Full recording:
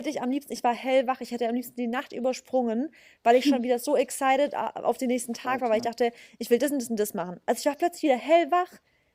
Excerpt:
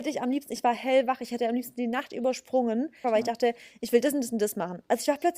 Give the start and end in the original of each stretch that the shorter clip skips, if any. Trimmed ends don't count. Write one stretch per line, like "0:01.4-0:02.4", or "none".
0:03.0-0:05.6